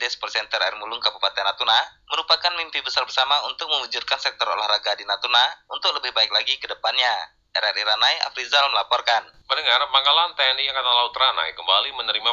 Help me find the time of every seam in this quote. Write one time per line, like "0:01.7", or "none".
none